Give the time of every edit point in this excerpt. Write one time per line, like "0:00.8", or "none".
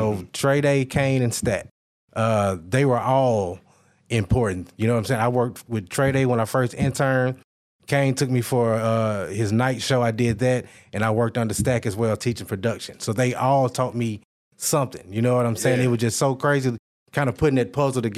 none